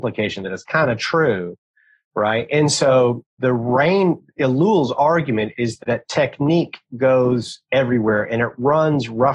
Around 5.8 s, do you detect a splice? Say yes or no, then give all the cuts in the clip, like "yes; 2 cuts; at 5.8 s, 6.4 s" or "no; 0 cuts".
yes; 2 cuts; at 3.4 s, 5.8 s